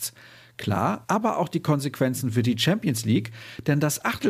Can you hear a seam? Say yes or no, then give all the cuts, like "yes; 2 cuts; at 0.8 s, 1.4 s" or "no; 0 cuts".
yes; 1 cut; at 1.0 s